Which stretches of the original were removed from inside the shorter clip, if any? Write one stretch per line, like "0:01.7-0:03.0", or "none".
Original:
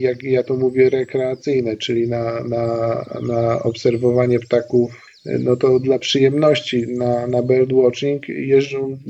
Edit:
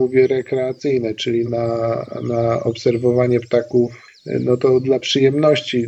0:02.1-0:02.4